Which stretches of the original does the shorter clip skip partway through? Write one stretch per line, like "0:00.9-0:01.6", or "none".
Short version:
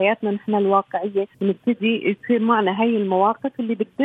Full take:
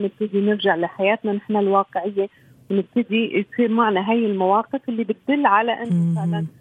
0:02.4-0:02.6